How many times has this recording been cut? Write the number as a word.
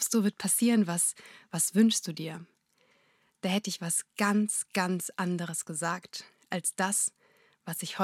zero